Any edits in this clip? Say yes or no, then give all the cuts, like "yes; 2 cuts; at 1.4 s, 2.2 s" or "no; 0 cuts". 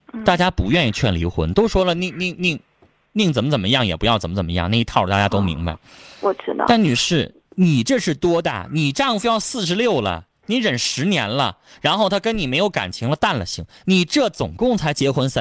no; 0 cuts